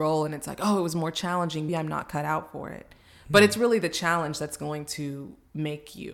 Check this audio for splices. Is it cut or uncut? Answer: cut